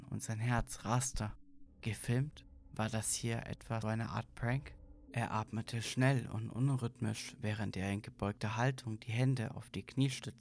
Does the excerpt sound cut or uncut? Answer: cut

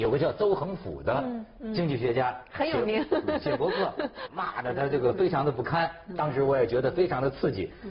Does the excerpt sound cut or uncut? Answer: cut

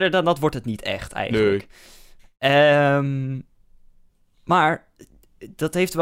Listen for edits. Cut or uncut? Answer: uncut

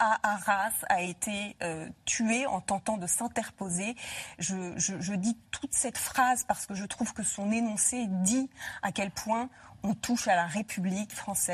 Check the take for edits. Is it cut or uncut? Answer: uncut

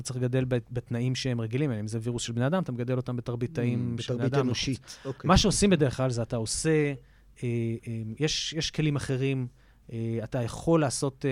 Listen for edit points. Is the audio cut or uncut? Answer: uncut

